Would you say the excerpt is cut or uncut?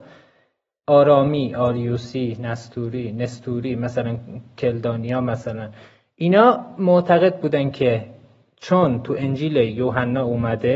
uncut